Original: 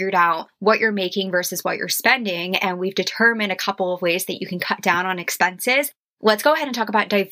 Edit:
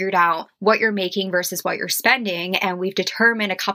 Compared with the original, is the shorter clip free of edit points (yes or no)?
yes